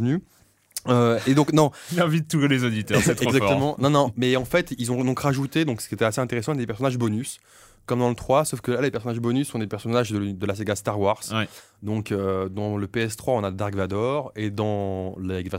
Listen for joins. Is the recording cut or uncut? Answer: uncut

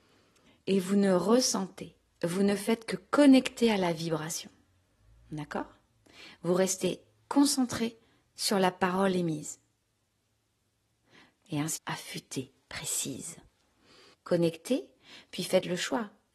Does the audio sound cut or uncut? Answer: cut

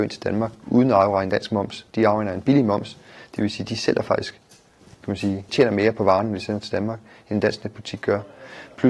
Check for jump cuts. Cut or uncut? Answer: cut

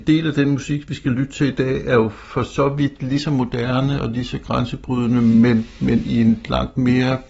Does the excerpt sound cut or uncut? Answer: uncut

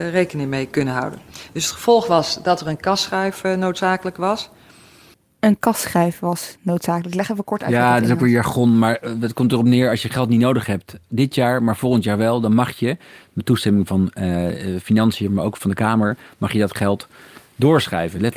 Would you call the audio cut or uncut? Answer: uncut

